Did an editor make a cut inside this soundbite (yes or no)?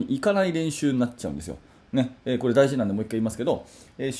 no